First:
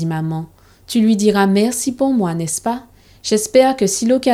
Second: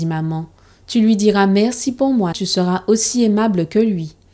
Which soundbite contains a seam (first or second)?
second